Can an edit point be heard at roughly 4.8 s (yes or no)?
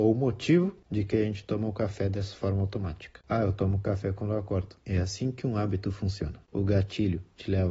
yes